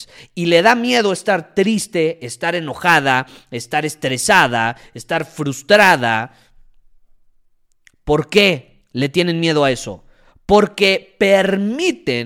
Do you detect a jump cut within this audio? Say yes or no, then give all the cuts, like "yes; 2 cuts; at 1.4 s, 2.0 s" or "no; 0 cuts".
yes; 1 cut; at 8.8 s